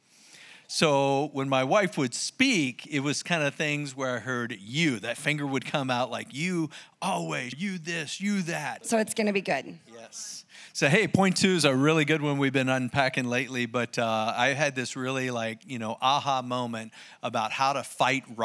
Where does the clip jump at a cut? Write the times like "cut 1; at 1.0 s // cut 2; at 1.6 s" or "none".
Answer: cut 1; at 7.5 s // cut 2; at 8.8 s